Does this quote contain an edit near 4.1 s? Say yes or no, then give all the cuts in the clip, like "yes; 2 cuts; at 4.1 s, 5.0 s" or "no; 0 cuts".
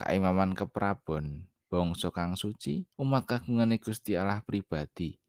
no; 1 cut; at 2.9 s